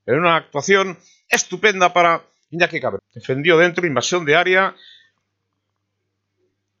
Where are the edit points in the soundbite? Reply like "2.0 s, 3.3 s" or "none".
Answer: 3.0 s